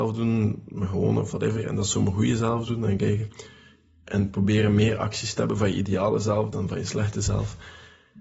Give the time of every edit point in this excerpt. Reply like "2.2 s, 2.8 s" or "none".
none